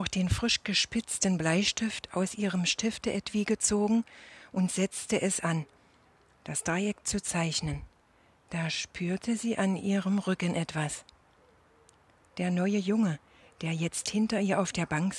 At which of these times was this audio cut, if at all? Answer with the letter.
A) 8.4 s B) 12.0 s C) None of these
C